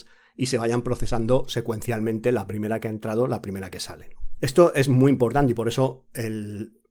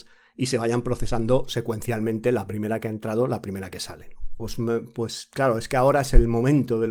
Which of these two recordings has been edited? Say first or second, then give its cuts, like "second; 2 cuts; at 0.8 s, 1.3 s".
second; 1 cut; at 4.4 s